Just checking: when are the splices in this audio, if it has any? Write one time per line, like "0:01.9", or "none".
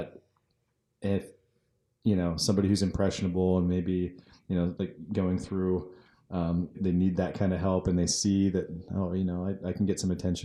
0:06.7